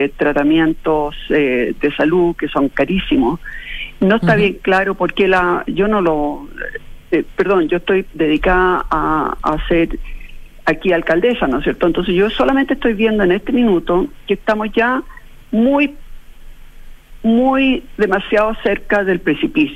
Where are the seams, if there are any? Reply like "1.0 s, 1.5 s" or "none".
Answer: 5.6 s